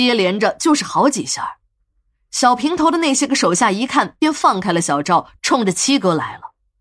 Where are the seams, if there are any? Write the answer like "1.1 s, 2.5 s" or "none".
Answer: none